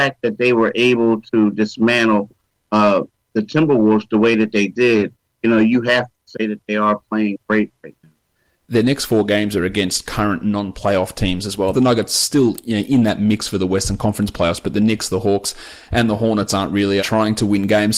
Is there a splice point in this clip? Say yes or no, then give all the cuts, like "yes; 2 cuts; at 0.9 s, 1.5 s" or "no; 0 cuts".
yes; 2 cuts; at 11.7 s, 17.0 s